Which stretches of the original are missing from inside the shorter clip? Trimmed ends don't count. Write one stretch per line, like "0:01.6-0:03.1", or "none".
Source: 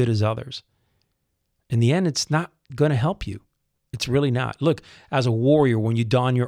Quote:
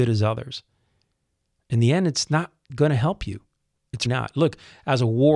0:04.0-0:04.3